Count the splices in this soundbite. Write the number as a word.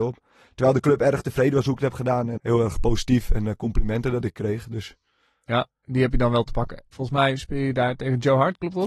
two